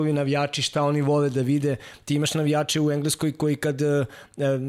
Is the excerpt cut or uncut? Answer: uncut